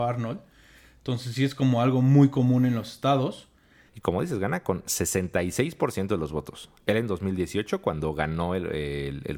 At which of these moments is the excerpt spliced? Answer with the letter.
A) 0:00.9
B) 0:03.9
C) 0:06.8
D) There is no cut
B